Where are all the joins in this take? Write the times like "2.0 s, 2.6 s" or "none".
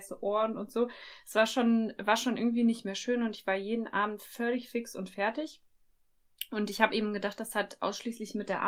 none